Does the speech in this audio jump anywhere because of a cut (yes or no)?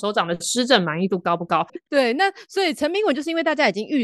yes